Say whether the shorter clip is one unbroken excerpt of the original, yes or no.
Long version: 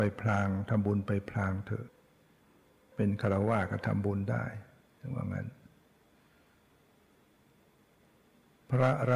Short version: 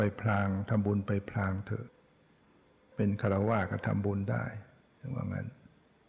yes